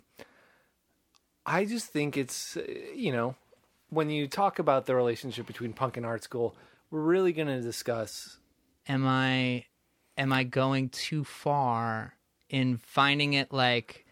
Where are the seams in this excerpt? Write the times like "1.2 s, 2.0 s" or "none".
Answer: 8.8 s